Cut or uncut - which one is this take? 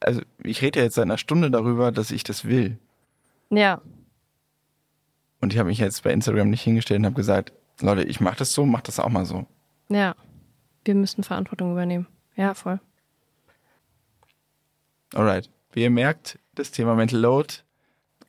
cut